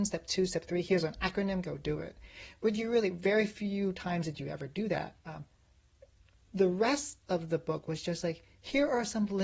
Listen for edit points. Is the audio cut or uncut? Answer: cut